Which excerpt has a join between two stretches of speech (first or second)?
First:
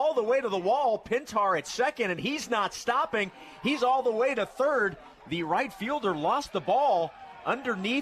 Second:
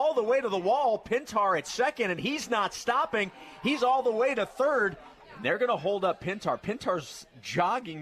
second